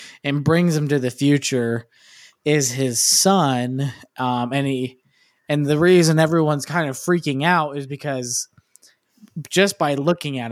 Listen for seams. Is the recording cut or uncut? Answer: uncut